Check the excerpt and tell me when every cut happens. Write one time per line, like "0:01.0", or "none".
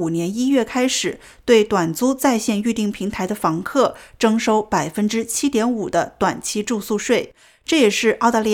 none